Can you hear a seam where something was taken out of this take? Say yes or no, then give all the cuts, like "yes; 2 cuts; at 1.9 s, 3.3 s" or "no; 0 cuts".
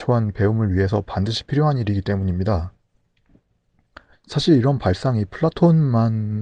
yes; 1 cut; at 4.1 s